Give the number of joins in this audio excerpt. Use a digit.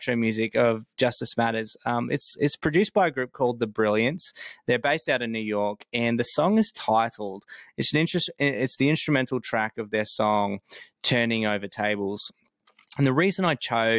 0